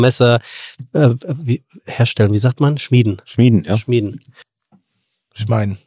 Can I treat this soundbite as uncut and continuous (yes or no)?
yes